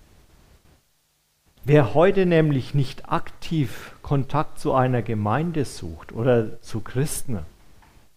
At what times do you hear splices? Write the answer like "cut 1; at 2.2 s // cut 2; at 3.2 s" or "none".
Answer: cut 1; at 1.5 s